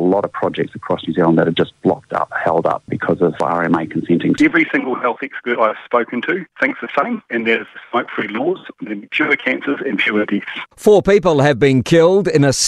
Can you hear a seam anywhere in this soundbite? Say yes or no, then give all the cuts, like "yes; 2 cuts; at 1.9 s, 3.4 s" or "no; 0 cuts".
yes; 3 cuts; at 2.3 s, 4.4 s, 10.7 s